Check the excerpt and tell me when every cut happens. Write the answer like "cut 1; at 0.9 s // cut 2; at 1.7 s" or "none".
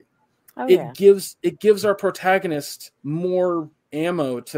cut 1; at 3.0 s

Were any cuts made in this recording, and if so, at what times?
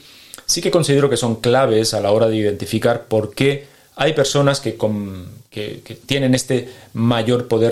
none

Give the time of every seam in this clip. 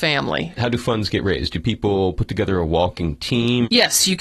none

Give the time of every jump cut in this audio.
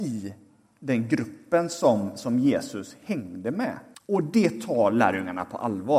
cut 1; at 3.9 s

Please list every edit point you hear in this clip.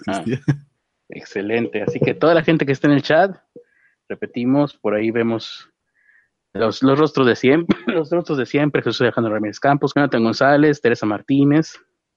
cut 1; at 9.9 s

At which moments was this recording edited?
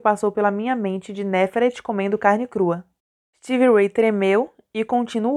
none

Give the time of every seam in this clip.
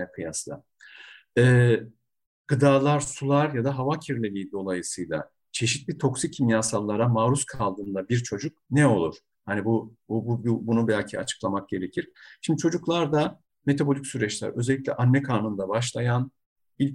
none

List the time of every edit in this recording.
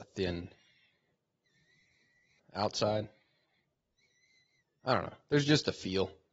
cut 1; at 2.4 s

